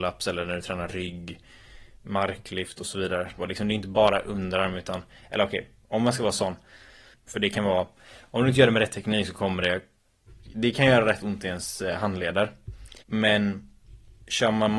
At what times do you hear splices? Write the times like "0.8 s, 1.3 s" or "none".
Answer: 3.4 s, 7.1 s, 13.0 s